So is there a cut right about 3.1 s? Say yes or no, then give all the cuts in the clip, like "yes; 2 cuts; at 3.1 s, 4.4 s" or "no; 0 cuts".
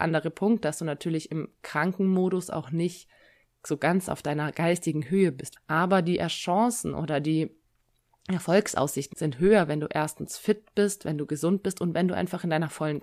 no; 2 cuts; at 5.6 s, 9.1 s